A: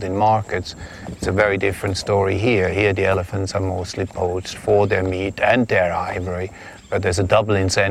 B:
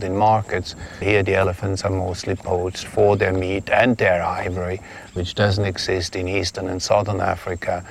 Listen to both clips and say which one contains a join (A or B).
B